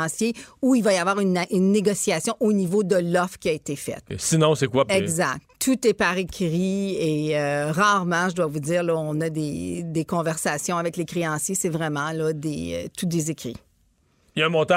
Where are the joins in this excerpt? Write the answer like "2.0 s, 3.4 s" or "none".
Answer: 4.9 s